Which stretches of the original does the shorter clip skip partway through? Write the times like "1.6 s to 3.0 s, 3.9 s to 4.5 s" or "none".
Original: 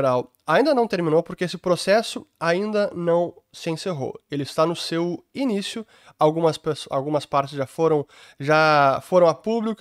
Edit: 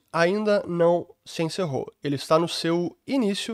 none